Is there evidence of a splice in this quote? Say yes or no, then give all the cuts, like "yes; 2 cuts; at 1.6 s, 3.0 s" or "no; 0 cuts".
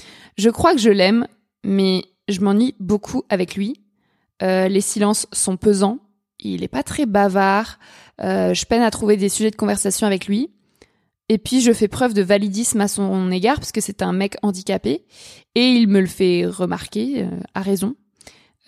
no; 0 cuts